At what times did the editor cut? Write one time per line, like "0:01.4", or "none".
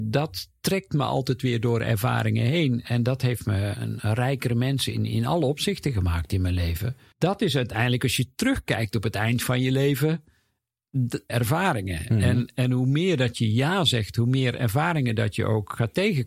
0:03.7
0:07.1
0:11.3